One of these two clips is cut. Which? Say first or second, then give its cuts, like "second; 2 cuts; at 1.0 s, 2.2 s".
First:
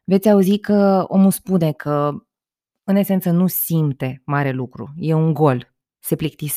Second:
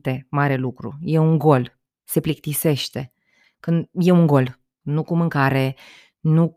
second; 2 cuts; at 3.4 s, 4.8 s